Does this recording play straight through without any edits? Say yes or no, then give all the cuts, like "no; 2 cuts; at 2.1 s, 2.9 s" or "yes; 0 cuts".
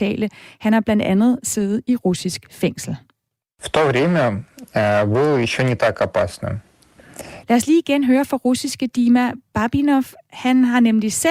no; 1 cut; at 7.4 s